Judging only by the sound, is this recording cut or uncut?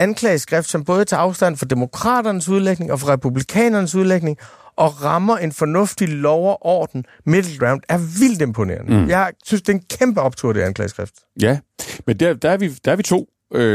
uncut